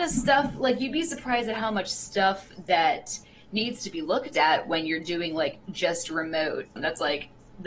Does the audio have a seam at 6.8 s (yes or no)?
yes